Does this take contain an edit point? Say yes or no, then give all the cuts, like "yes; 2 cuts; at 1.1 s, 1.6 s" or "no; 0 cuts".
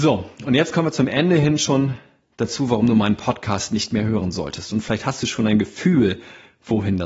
no; 0 cuts